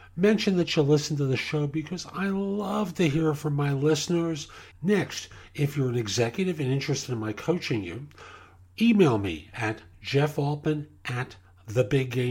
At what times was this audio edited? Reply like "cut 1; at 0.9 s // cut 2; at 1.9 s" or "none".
cut 1; at 4.7 s